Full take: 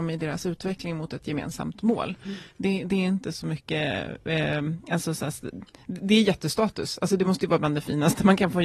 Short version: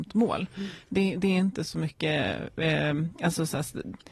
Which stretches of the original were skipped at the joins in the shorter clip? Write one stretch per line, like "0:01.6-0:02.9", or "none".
none